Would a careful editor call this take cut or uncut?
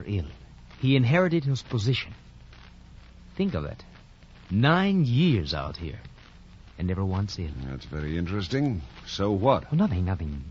uncut